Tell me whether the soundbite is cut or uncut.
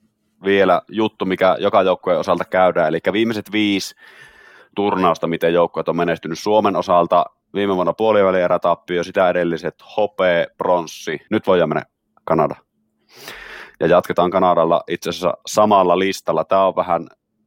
cut